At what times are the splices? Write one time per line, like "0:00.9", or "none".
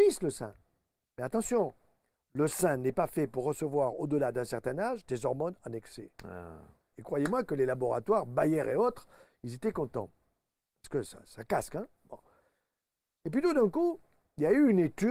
0:06.9